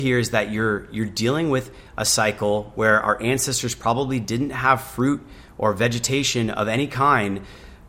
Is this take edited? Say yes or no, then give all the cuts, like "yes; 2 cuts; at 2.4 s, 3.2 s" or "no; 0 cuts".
no; 0 cuts